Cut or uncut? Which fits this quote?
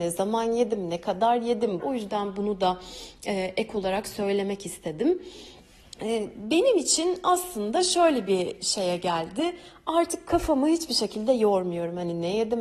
cut